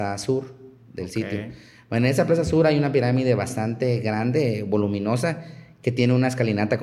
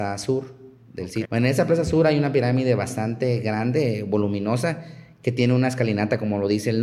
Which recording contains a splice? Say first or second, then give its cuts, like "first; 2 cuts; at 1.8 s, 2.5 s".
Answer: second; 1 cut; at 1.2 s